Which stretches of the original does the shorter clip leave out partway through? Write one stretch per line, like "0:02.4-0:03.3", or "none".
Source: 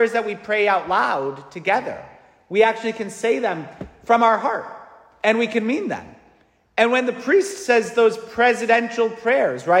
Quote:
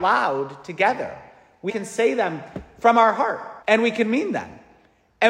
0:02.6-0:02.9
0:04.9-0:05.2